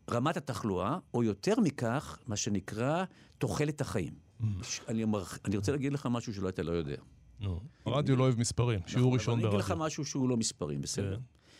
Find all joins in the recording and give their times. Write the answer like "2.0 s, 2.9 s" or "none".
4.6 s, 7.9 s